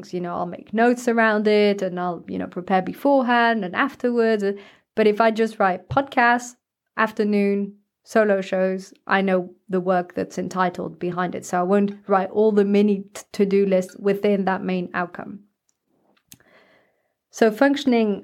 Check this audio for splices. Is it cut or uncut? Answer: uncut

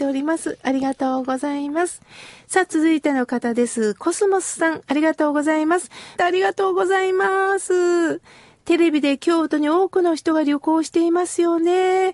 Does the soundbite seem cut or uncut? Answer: cut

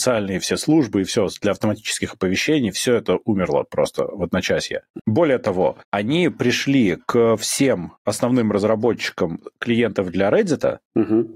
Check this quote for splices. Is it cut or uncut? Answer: cut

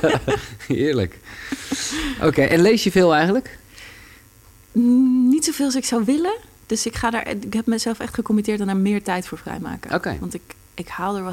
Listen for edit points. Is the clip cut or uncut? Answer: uncut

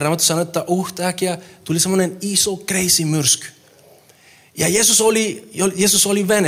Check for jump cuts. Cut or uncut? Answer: uncut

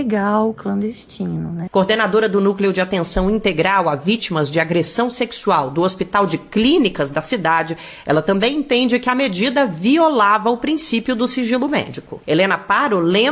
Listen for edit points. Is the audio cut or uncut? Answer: cut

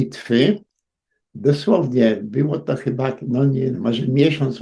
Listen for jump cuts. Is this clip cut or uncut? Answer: cut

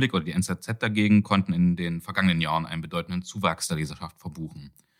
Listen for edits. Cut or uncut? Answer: uncut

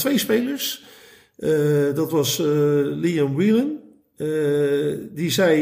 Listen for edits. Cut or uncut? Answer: uncut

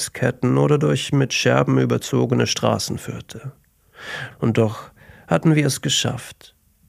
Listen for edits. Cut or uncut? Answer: cut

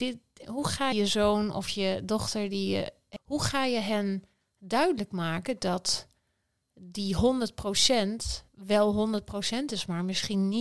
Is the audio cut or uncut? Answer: cut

